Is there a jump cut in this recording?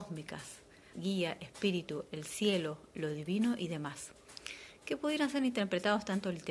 yes; 1 cut; at 0.9 s

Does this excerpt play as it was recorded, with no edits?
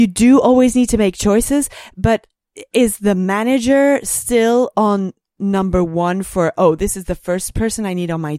yes; 0 cuts

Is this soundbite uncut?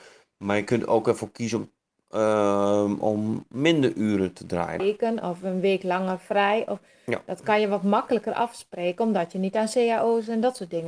no; 1 cut; at 4.8 s

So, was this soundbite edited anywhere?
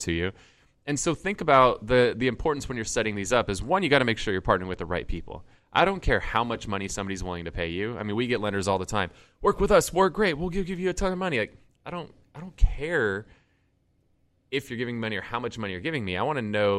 no; 0 cuts

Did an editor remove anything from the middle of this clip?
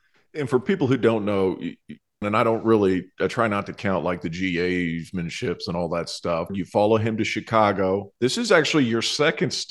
yes; 3 cuts; at 2.2 s, 6.5 s, 8.2 s

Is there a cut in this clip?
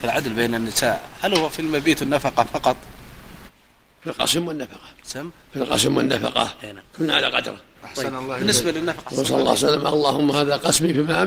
no; 0 cuts

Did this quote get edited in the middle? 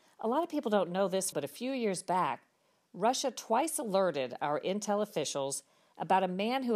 yes; 1 cut; at 1.3 s

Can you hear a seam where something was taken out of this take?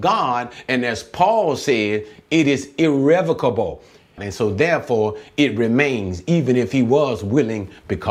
yes; 1 cut; at 4.2 s

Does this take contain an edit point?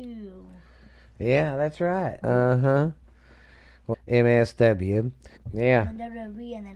yes; 3 cuts; at 2.2 s, 3.9 s, 5.4 s

